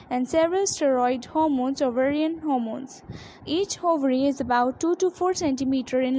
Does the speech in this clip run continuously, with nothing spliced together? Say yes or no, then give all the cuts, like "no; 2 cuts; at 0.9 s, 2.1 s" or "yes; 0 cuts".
no; 1 cut; at 3.4 s